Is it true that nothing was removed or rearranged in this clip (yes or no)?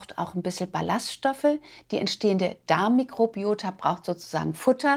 yes